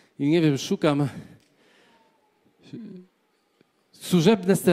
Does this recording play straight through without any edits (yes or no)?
yes